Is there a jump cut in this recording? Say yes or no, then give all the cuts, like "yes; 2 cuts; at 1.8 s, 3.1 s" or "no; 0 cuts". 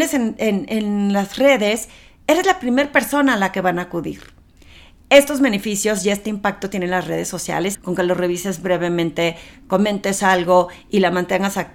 yes; 2 cuts; at 7.7 s, 9.5 s